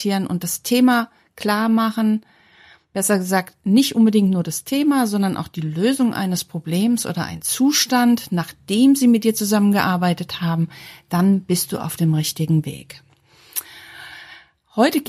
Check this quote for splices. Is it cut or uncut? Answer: uncut